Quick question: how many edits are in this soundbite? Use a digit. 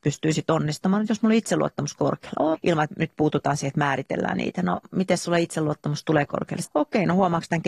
2